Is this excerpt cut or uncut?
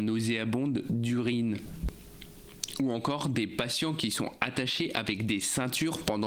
uncut